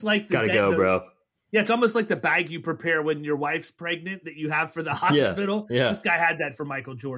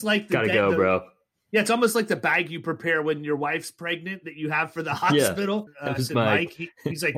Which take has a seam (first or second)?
second